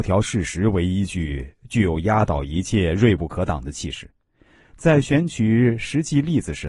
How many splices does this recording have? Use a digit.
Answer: 0